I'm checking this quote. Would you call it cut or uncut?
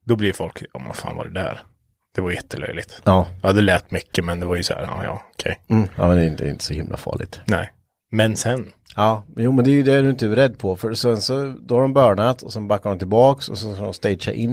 uncut